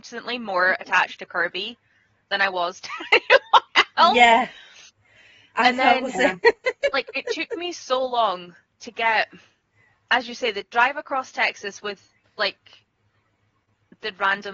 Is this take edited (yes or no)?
no